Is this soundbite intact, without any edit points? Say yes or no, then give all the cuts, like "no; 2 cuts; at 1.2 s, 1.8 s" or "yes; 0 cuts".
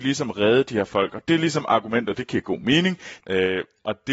no; 1 cut; at 3.2 s